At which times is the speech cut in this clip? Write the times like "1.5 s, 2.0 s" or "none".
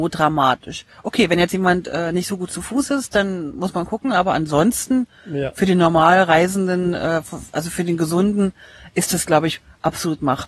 none